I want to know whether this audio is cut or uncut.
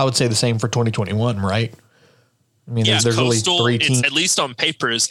cut